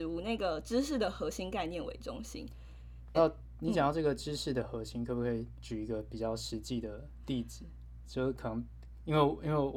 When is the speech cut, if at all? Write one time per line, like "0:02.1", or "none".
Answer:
0:03.1

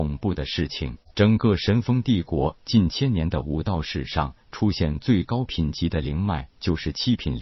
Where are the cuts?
none

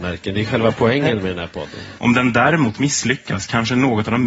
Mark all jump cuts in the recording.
0:02.0

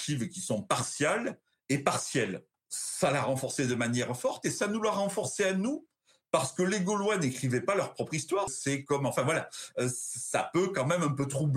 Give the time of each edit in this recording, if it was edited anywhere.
0:02.5
0:08.5

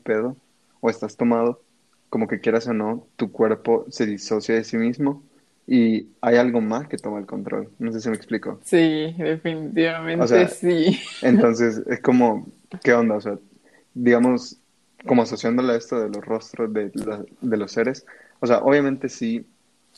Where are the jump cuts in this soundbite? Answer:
none

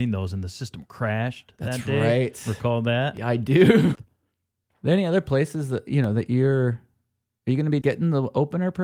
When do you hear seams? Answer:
0:04.0
0:07.8

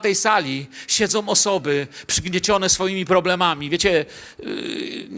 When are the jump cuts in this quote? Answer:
none

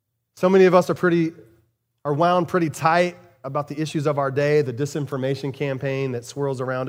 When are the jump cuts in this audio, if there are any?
none

